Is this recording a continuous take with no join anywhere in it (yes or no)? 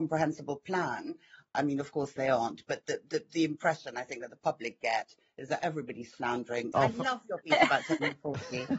no